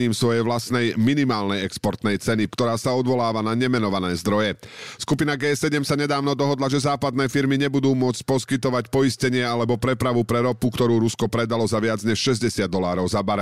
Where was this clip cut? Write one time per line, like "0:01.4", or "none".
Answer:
0:02.5